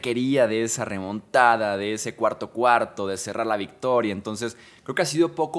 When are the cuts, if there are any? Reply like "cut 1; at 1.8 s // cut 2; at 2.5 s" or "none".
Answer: none